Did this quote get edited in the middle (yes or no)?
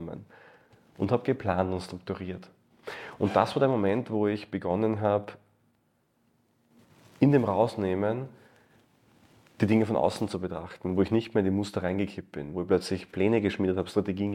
no